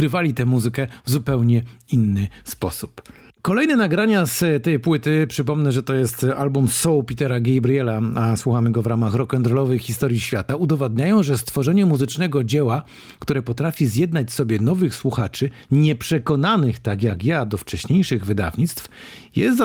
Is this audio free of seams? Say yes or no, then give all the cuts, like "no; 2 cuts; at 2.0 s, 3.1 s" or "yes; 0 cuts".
yes; 0 cuts